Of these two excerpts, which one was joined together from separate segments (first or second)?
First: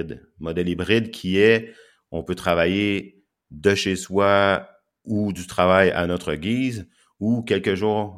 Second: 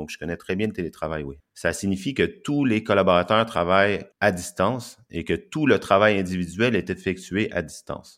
second